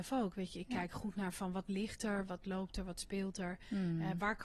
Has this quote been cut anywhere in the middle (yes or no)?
yes